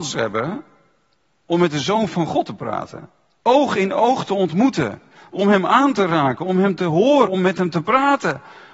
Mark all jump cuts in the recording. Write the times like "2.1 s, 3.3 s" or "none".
3.4 s, 7.3 s